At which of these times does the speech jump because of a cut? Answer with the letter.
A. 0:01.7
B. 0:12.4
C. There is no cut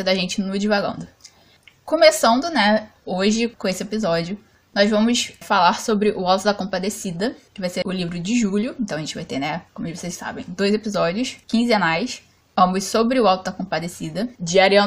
C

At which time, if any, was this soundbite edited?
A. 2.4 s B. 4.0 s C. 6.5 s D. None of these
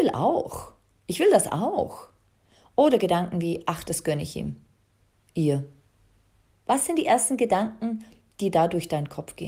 C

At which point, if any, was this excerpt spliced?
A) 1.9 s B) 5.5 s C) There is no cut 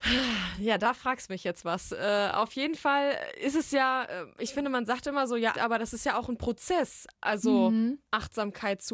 B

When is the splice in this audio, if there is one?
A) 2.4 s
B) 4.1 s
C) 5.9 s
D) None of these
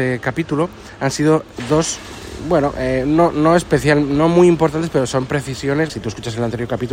C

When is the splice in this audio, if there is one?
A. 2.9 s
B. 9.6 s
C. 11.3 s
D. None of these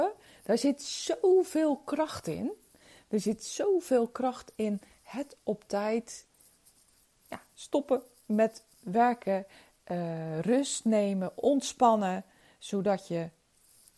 D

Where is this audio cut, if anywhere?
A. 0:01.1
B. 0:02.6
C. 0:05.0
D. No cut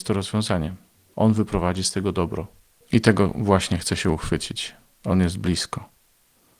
A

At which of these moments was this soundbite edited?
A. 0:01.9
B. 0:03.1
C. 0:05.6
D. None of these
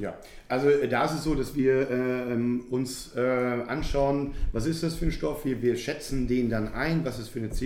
D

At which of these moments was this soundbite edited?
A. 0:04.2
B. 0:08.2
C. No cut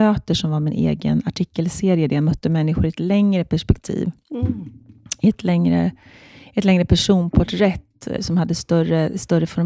B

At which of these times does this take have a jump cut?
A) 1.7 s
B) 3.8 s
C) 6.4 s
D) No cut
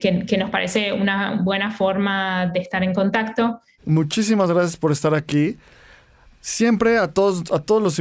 B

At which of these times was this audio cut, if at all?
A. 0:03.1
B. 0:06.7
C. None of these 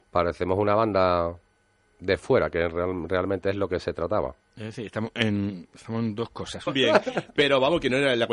B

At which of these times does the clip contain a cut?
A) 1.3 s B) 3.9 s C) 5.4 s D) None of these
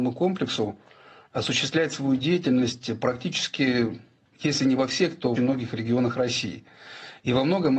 C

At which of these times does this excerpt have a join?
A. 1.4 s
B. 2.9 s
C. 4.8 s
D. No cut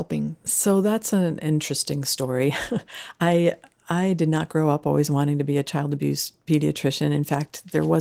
D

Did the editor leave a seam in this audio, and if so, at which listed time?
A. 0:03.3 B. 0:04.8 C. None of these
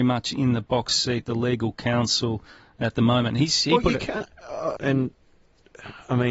B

